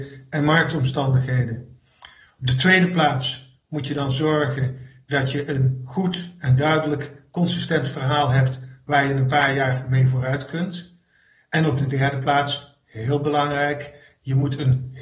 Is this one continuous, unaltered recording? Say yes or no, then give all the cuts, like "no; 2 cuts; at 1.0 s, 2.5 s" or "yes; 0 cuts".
yes; 0 cuts